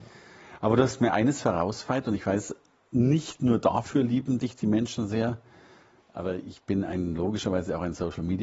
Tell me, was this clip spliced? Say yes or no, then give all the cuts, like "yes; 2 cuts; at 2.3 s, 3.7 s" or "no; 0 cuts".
no; 0 cuts